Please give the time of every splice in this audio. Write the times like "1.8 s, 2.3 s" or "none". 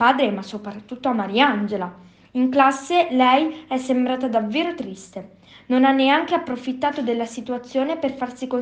none